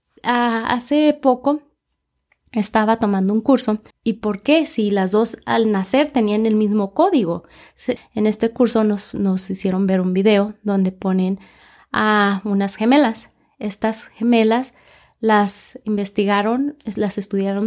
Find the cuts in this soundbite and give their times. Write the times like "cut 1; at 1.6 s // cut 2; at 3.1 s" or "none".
cut 1; at 3.9 s // cut 2; at 8.0 s